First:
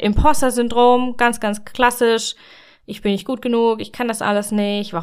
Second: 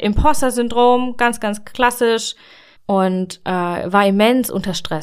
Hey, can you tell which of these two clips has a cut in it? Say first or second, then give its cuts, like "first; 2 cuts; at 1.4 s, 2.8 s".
second; 1 cut; at 2.8 s